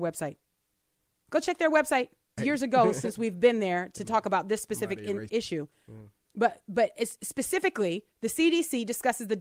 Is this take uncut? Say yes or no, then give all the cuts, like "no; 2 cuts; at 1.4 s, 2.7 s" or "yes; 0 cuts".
no; 2 cuts; at 2.4 s, 5.3 s